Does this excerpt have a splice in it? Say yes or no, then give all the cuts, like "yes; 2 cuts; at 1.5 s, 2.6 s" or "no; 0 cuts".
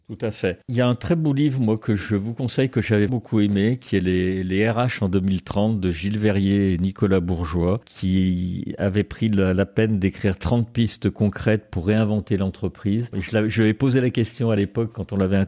yes; 2 cuts; at 3.1 s, 13.1 s